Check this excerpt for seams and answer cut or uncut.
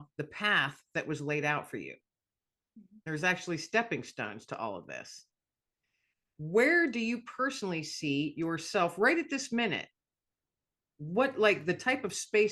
uncut